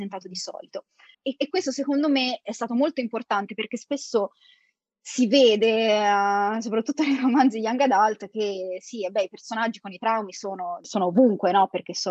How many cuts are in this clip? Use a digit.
1